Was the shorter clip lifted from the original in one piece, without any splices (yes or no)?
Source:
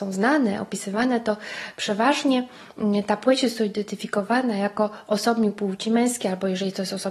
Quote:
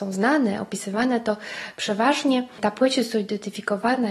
no